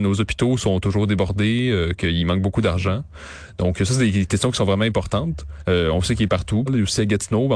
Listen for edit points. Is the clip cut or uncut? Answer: cut